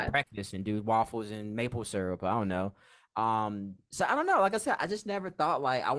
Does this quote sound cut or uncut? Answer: uncut